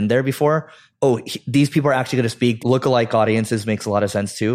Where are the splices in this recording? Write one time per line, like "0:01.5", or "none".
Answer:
0:00.9
0:02.6